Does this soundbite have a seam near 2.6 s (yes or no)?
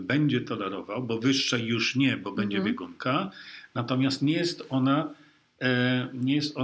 no